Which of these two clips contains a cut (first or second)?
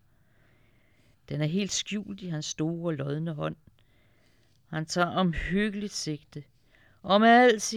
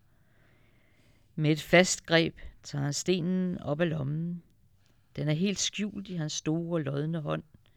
first